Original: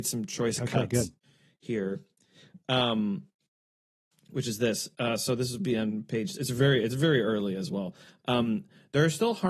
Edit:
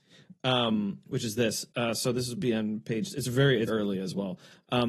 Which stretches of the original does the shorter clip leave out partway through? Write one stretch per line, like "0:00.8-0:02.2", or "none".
0:03.3-0:04.2
0:06.9-0:07.2